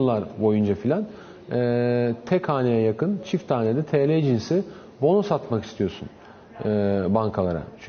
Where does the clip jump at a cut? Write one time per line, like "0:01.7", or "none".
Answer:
none